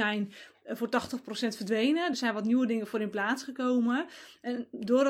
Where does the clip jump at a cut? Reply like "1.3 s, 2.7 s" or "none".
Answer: none